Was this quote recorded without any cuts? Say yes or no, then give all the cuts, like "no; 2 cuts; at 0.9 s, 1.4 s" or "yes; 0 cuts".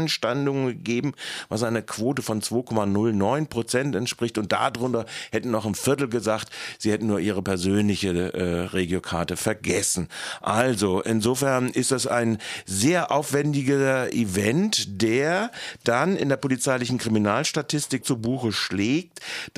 no; 1 cut; at 18.0 s